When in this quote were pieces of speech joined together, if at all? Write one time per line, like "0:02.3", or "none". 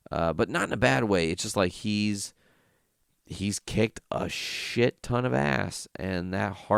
none